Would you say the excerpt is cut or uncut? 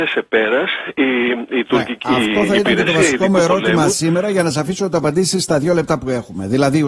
uncut